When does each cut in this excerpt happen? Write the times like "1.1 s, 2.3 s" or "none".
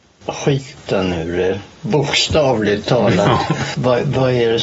none

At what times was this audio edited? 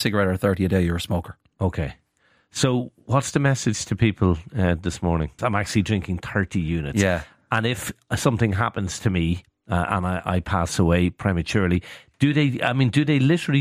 5.4 s

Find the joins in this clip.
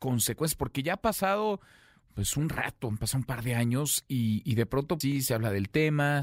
5.0 s

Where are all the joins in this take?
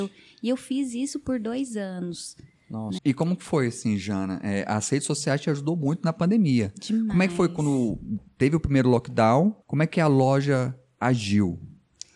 3.0 s, 9.6 s

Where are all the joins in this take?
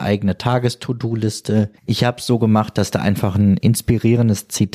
1.8 s

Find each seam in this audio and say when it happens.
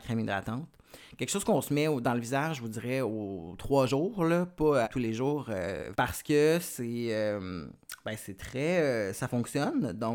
4.8 s, 5.9 s

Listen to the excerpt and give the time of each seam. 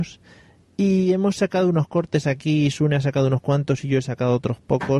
none

